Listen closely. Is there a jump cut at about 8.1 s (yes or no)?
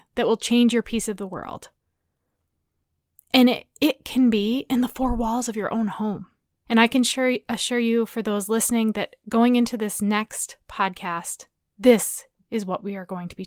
no